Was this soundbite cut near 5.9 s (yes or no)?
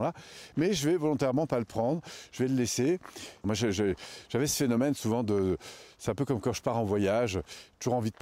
no